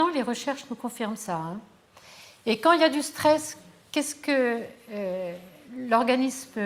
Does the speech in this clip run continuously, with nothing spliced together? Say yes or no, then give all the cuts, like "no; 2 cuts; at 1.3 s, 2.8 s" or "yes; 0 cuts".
yes; 0 cuts